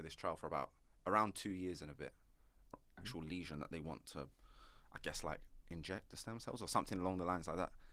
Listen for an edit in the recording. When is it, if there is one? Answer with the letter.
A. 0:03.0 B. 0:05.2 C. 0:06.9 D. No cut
A